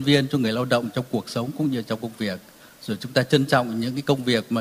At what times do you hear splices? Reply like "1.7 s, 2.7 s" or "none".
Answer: none